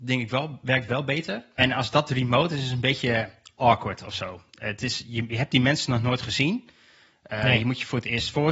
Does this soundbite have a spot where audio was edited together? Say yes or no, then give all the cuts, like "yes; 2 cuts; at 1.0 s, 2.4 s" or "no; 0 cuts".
yes; 1 cut; at 1.6 s